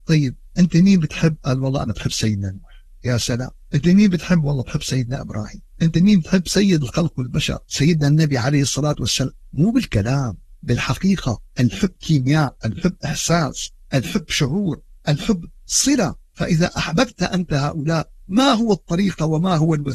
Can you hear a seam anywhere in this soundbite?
yes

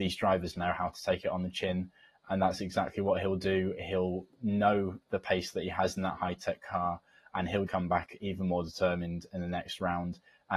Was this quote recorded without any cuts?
no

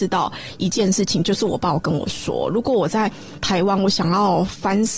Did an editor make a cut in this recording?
no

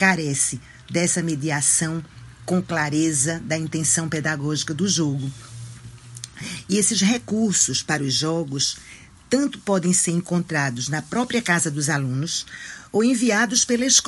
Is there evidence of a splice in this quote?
no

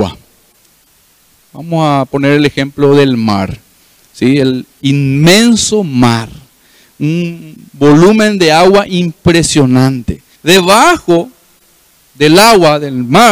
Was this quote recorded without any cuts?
no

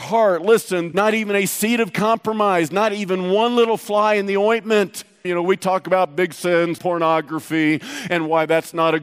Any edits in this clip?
yes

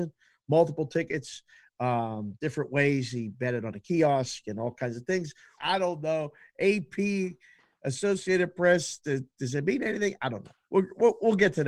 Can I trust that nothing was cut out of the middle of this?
no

